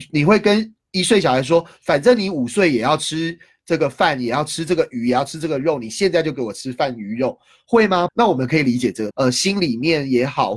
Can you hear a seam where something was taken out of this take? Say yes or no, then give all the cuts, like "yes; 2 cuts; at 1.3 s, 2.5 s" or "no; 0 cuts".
yes; 2 cuts; at 8.1 s, 9.1 s